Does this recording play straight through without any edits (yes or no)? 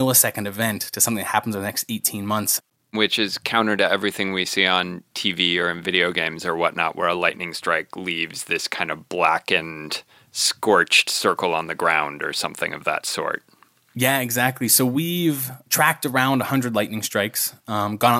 yes